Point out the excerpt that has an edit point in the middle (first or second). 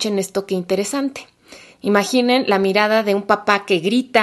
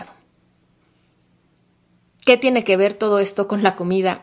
first